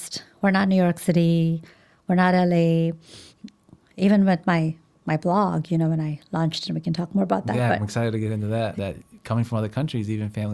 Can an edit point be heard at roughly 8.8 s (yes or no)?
yes